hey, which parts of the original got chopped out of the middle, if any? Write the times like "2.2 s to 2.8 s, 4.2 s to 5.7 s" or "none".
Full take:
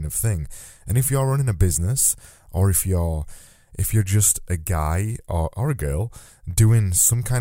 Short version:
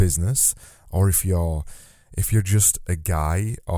none